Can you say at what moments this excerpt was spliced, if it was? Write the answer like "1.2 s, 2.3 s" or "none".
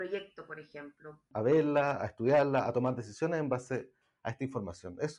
1.3 s

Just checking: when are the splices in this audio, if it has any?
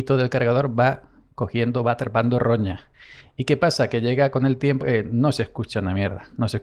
4.8 s

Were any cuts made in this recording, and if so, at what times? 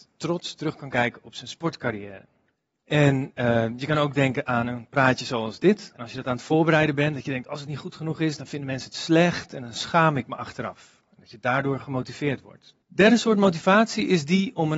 12.8 s

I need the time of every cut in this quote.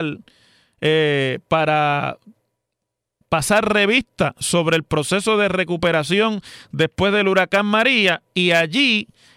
none

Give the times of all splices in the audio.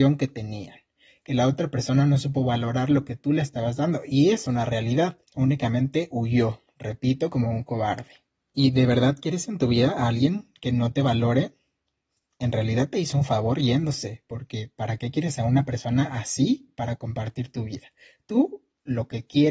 5.2 s

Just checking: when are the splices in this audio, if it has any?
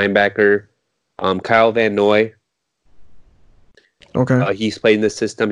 none

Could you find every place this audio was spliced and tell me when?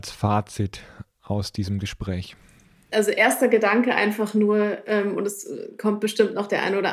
none

